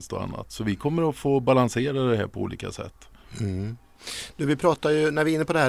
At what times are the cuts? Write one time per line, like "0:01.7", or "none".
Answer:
none